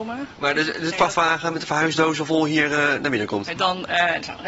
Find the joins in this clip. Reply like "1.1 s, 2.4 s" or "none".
0.9 s, 3.6 s